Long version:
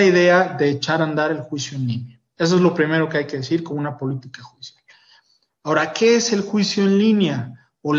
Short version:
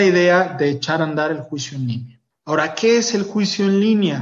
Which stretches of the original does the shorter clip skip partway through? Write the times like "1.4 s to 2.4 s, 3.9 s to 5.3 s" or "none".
2.3 s to 5.5 s